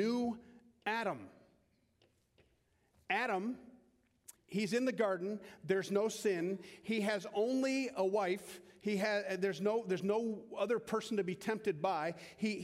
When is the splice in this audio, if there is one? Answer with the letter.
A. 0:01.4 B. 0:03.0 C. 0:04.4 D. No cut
C